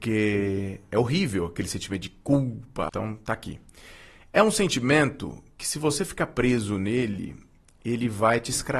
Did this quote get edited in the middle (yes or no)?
yes